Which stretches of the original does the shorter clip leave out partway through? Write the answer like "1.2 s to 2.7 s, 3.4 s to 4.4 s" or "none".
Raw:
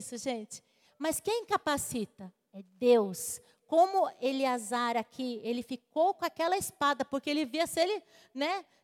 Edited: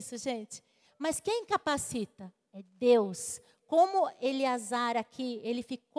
none